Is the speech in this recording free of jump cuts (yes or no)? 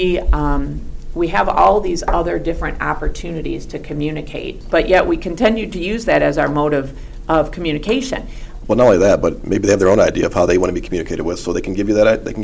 no